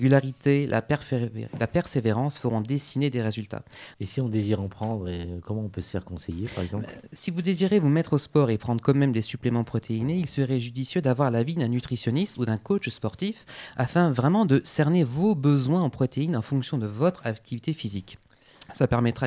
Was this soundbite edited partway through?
yes; 1 cut; at 3.9 s

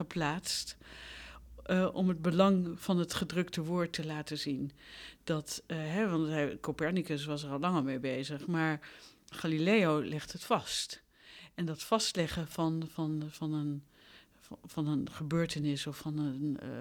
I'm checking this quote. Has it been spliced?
no; 0 cuts

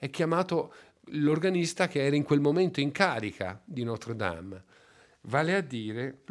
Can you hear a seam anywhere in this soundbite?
no; 0 cuts

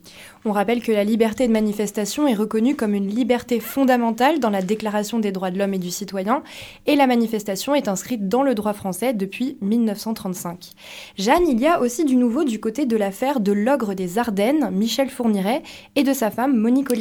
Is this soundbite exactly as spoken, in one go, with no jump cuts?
yes; 0 cuts

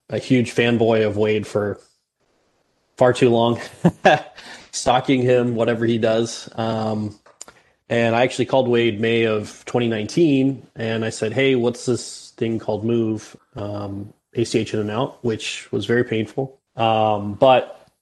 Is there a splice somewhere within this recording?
yes; 2 cuts; at 13.4 s, 16.7 s

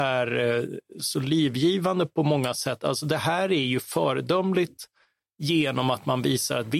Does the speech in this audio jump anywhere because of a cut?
no; 0 cuts

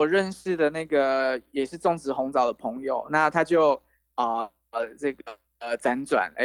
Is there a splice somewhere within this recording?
no; 0 cuts

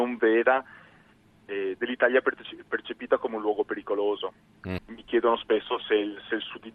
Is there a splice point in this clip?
yes; 1 cut; at 4.8 s

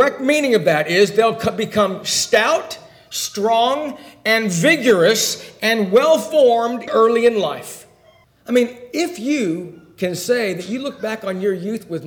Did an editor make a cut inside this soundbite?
yes; 2 cuts; at 6.9 s, 8.2 s

